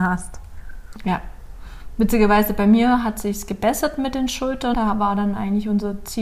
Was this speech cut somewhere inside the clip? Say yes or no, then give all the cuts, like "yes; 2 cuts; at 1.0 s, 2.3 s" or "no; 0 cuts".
yes; 1 cut; at 4.7 s